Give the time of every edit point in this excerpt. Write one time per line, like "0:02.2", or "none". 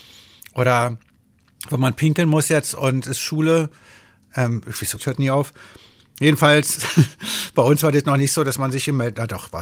0:05.0